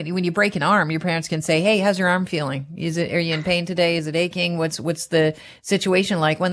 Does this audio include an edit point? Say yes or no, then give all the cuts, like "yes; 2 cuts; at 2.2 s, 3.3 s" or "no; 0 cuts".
no; 0 cuts